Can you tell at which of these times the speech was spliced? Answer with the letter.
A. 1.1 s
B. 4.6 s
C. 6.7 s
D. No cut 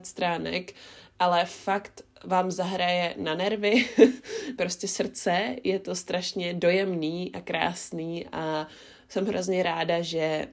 B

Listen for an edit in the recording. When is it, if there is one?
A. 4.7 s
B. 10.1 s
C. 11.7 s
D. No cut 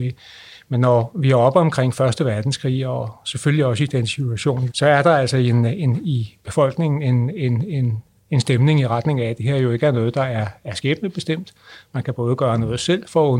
A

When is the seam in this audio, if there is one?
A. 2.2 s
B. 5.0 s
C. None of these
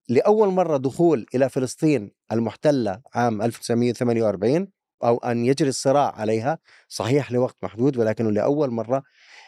B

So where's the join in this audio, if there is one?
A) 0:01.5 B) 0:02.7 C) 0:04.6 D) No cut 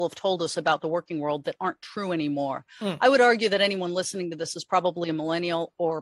D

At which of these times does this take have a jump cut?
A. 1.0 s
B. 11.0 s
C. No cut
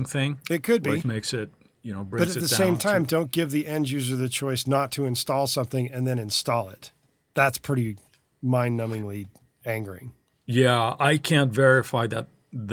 A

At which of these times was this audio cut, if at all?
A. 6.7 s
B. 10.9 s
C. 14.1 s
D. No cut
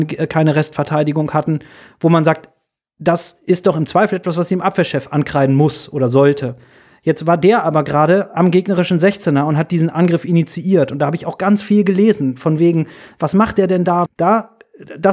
C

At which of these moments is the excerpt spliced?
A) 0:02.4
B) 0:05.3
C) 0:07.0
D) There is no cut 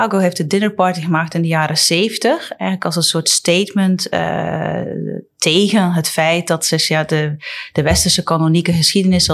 D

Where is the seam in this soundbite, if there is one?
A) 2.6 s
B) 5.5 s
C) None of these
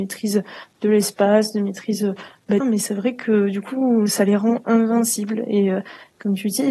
A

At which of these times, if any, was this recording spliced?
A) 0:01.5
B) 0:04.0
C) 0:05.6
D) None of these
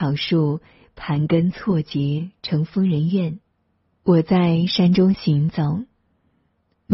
B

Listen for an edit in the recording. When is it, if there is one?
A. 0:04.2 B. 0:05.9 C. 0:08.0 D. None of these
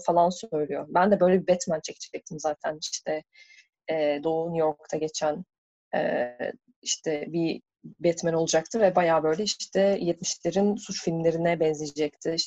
A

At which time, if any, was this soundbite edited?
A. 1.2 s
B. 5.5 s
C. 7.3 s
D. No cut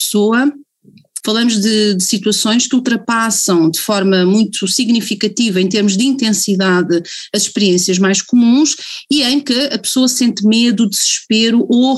A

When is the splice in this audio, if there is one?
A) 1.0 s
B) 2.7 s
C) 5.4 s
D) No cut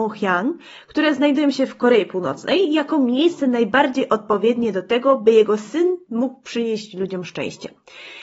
D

